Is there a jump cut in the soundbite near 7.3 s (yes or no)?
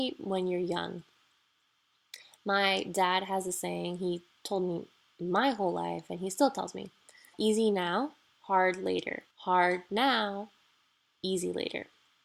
yes